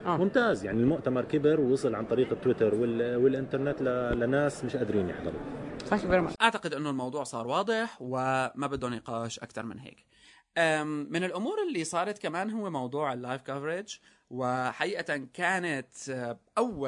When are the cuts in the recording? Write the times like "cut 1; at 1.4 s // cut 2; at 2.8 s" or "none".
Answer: cut 1; at 6.3 s